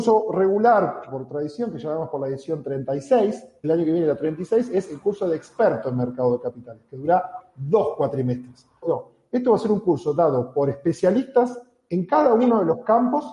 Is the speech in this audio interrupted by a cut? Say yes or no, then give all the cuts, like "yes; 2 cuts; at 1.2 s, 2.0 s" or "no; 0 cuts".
yes; 2 cuts; at 3.6 s, 8.8 s